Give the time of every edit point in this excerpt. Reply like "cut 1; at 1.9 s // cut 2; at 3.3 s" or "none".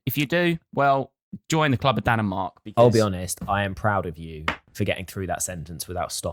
none